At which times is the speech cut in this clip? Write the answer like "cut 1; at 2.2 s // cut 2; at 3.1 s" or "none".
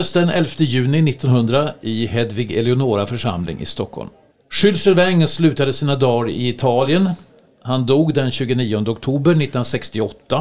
cut 1; at 4.3 s